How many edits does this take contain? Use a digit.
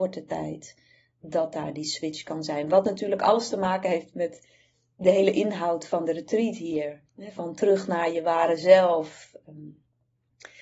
1